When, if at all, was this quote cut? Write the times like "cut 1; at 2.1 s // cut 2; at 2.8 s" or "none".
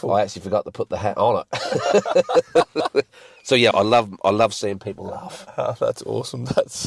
cut 1; at 3.7 s